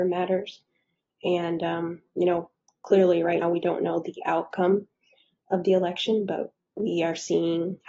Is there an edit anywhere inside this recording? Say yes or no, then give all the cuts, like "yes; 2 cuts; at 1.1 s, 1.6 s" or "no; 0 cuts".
yes; 2 cuts; at 1.1 s, 3.4 s